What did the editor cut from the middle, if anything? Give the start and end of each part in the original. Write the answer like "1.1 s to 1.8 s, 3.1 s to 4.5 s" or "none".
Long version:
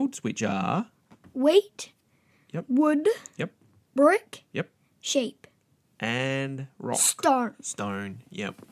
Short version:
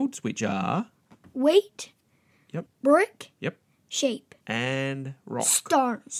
2.7 s to 3.8 s, 5.5 s to 5.9 s